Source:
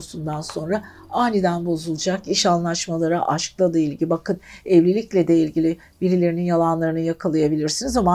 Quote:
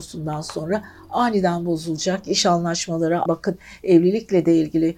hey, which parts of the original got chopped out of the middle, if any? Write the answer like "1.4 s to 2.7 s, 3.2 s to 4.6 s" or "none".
3.3 s to 4.1 s